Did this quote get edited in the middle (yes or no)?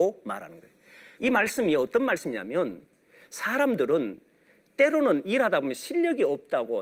yes